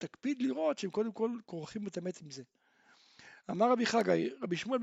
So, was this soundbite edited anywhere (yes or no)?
no